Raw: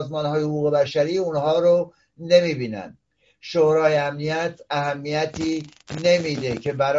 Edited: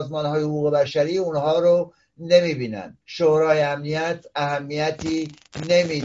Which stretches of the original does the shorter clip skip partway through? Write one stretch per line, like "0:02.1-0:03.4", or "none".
0:03.0-0:03.4